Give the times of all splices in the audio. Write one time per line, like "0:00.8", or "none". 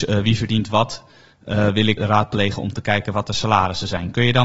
0:02.0